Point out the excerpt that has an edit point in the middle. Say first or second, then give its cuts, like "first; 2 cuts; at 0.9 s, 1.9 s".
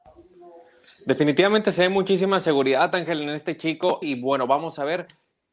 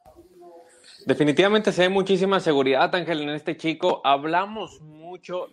first; 1 cut; at 4.0 s